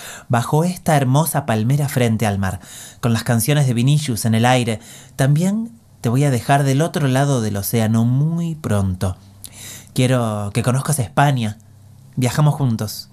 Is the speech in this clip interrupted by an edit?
no; 0 cuts

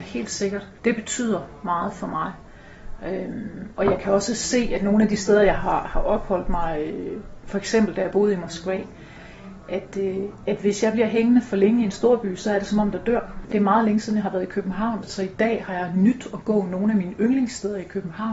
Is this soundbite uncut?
no; 1 cut; at 12.9 s

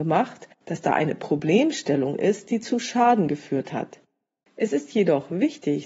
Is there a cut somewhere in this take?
yes; 1 cut; at 4.4 s

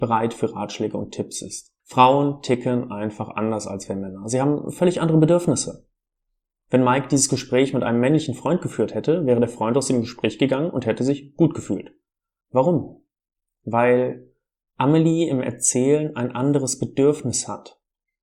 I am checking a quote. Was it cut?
yes; 2 cuts; at 1.8 s, 12.4 s

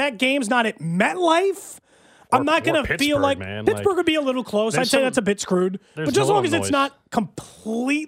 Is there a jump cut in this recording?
no; 0 cuts

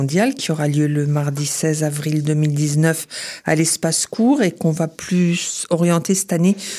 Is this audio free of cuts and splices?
yes; 0 cuts

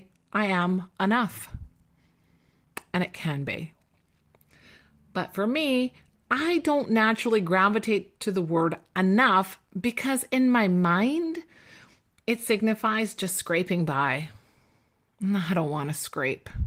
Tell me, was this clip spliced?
no; 0 cuts

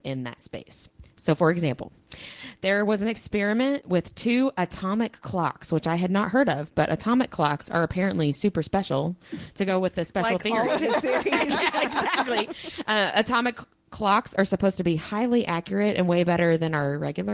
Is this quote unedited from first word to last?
yes; 0 cuts

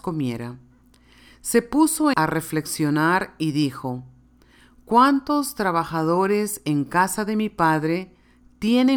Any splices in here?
yes; 1 cut; at 2.1 s

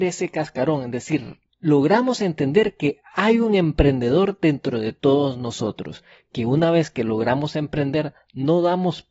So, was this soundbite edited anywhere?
yes; 1 cut; at 1.5 s

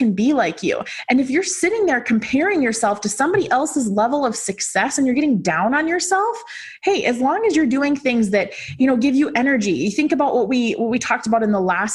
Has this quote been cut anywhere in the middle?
no; 0 cuts

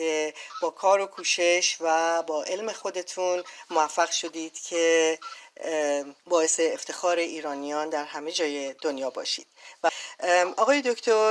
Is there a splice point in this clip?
yes; 1 cut; at 6.2 s

